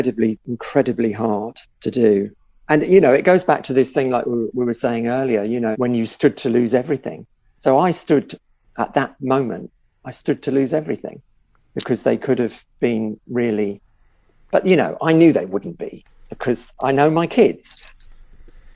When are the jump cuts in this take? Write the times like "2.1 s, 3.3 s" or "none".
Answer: 5.7 s